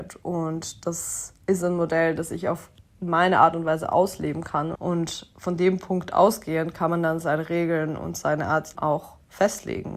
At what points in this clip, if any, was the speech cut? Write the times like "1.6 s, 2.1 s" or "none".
1.4 s, 4.7 s, 8.7 s